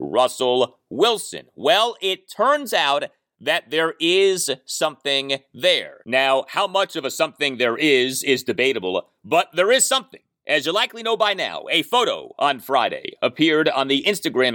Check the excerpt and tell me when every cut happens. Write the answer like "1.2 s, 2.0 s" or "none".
none